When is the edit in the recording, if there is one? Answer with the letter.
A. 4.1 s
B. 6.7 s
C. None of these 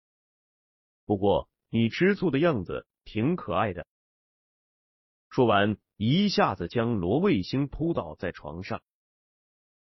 C